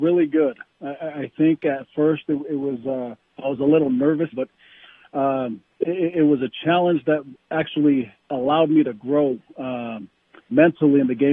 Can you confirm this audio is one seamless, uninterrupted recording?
no; 2 cuts; at 4.3 s, 5.7 s

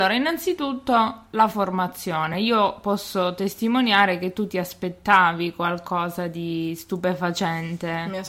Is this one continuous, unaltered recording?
yes; 0 cuts

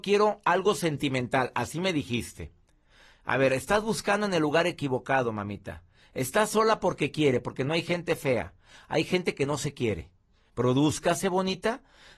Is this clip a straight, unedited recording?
no; 1 cut; at 10.5 s

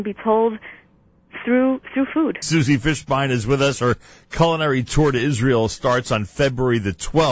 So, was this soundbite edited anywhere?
yes; 1 cut; at 2.4 s

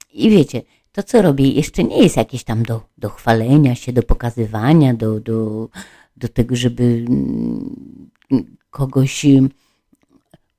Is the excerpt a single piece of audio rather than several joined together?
yes; 0 cuts

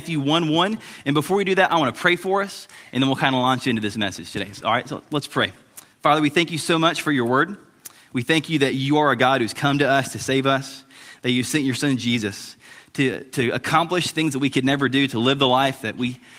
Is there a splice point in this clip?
no; 0 cuts

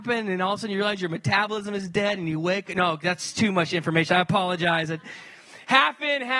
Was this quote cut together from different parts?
no; 0 cuts

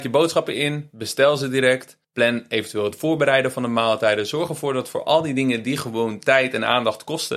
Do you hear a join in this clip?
yes; 1 cut; at 2.0 s

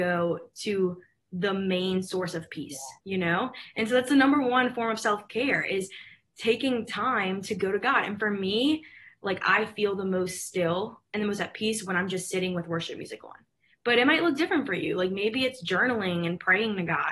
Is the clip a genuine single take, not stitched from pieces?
no; 1 cut; at 3.0 s

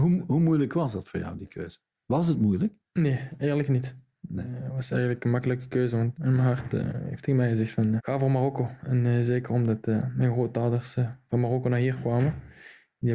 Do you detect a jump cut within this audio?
yes; 2 cuts; at 6.1 s, 8.0 s

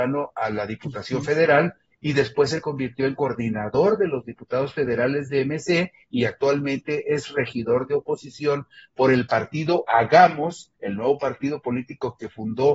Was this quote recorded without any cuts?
yes; 0 cuts

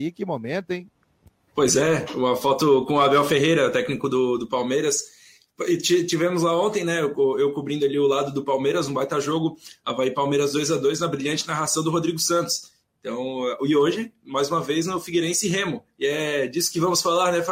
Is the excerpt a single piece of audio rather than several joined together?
yes; 0 cuts

